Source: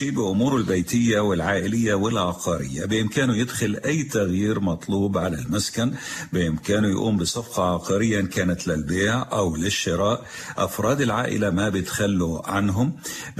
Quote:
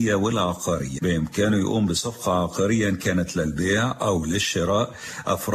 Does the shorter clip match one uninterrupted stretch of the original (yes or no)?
no